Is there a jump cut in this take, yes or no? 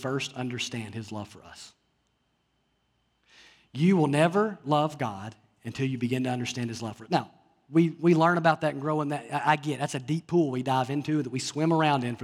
no